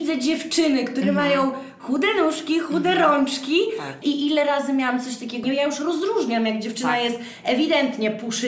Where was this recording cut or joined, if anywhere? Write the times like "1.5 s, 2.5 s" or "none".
4.0 s, 5.4 s

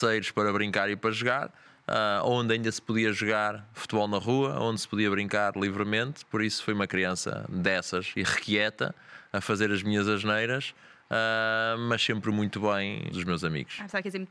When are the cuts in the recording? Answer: 13.1 s

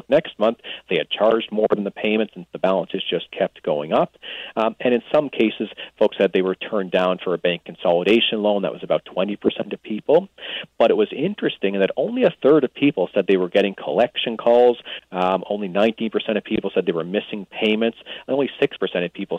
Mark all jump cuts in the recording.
none

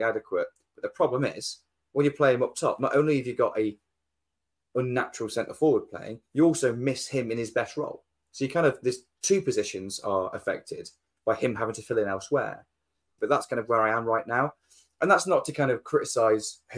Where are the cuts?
13.2 s

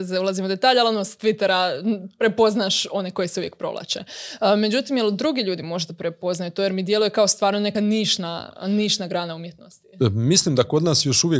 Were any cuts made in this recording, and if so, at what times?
none

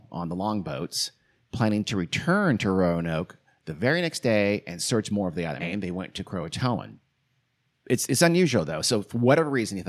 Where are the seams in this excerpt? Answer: 5.6 s

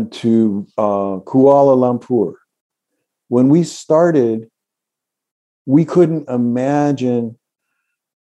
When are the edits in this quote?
6.3 s

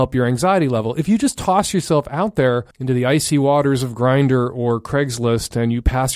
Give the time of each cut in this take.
2.7 s

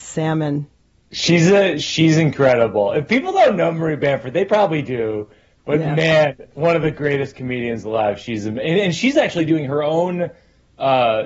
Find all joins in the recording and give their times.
none

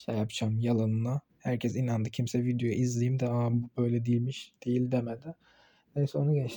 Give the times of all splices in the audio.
none

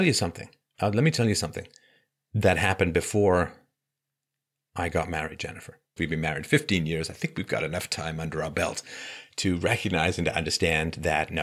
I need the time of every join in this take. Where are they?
6.0 s

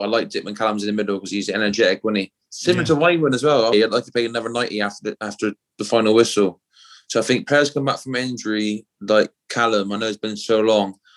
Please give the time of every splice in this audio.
3.7 s

